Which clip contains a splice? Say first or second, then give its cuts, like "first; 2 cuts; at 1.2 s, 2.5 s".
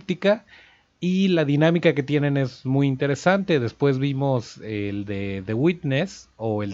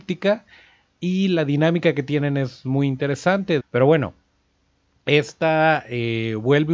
second; 1 cut; at 3.6 s